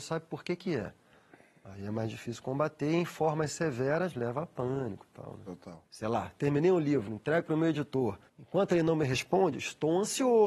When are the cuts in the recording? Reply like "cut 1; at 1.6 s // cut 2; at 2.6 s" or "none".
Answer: cut 1; at 5.8 s // cut 2; at 8.3 s